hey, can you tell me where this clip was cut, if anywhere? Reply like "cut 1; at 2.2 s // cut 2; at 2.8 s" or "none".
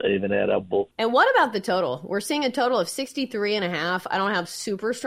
cut 1; at 0.9 s